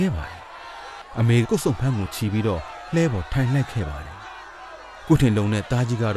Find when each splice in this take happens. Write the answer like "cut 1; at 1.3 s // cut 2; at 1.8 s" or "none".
cut 1; at 1.4 s